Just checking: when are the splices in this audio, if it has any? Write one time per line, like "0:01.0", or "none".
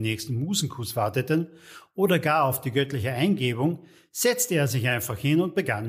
none